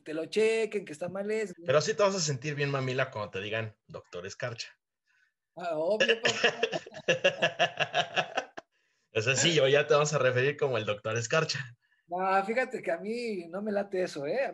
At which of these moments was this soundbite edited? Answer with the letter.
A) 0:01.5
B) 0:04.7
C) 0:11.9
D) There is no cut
A